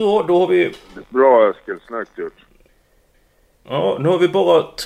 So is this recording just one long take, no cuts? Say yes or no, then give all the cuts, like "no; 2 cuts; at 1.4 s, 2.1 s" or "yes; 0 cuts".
yes; 0 cuts